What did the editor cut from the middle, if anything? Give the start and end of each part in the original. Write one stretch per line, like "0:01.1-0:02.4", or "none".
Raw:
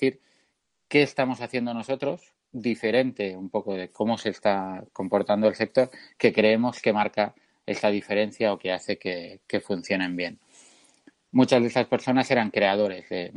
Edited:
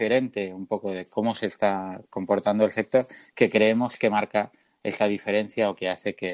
none